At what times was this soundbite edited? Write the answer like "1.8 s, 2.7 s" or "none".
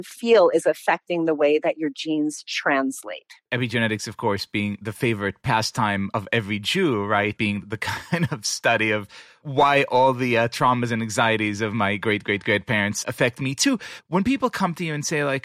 7.6 s, 14.0 s